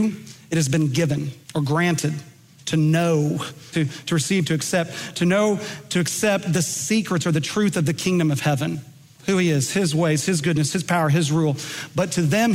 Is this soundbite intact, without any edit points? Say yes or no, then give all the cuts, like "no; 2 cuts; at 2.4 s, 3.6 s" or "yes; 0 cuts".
no; 3 cuts; at 1.4 s, 3.7 s, 9.1 s